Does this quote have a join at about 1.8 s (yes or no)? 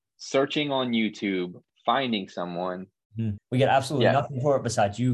no